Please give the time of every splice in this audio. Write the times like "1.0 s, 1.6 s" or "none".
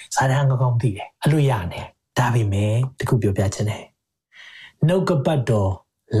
1.1 s

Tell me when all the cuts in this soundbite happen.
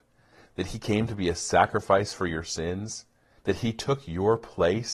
3.4 s

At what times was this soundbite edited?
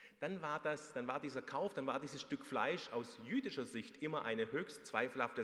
none

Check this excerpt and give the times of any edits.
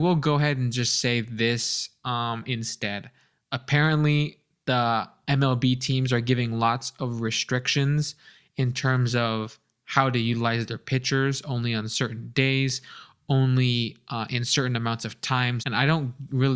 15.6 s

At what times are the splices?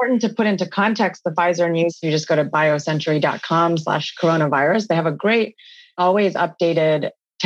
none

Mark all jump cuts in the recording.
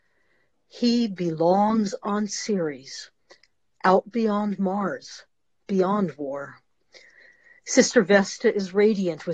none

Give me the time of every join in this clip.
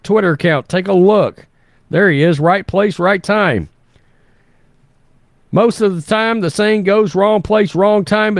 none

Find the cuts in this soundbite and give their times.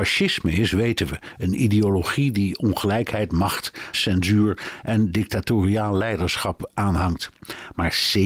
3.9 s

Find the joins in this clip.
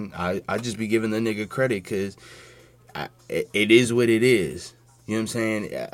none

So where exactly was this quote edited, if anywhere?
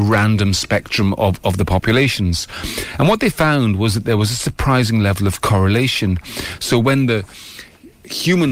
none

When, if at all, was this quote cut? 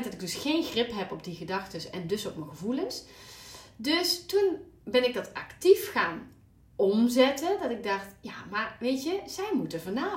none

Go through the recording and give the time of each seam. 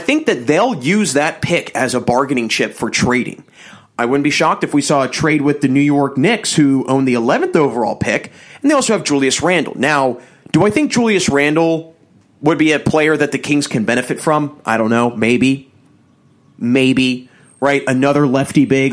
none

